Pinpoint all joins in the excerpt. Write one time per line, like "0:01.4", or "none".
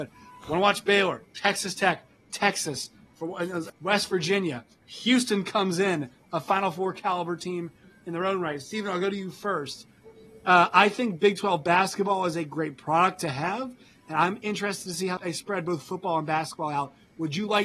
0:03.7
0:15.2